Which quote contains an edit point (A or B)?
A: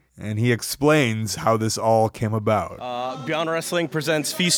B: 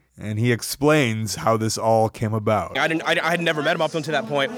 B